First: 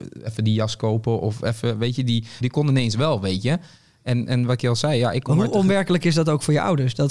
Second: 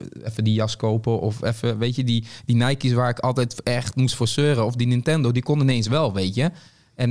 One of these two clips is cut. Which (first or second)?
first